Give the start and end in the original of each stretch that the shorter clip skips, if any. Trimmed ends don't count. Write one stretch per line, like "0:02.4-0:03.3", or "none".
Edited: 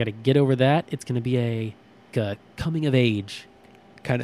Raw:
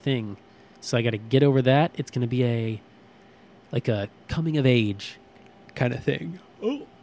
0:03.2-0:03.8